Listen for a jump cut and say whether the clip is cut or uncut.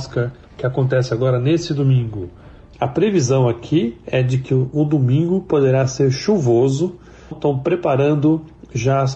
cut